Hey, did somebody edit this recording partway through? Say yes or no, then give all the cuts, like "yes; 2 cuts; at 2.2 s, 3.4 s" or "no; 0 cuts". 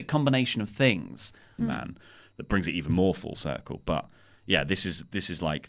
yes; 1 cut; at 1.6 s